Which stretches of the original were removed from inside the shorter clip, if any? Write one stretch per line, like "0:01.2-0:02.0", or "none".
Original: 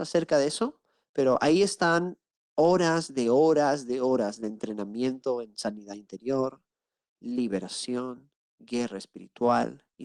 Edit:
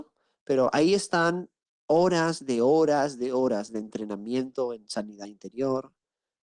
none